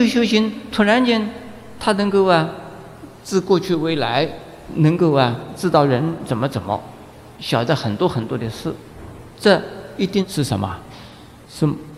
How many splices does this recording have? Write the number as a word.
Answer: zero